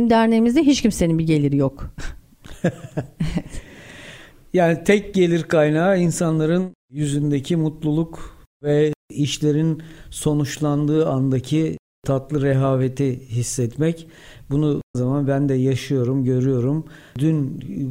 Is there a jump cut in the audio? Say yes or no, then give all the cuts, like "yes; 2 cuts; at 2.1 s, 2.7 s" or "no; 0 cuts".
yes; 1 cut; at 14.9 s